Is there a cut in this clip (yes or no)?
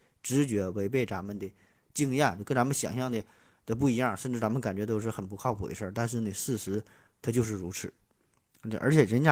no